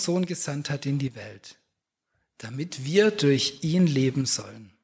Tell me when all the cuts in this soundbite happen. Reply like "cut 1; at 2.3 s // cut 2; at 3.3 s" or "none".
none